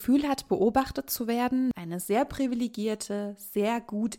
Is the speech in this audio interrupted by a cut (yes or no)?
yes